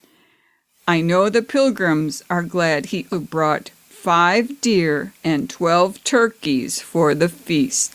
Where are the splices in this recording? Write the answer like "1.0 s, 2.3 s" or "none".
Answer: 3.1 s, 5.2 s